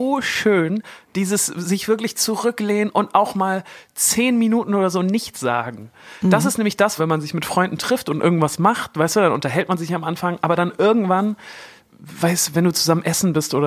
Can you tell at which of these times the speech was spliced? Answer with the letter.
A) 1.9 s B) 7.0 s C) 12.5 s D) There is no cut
B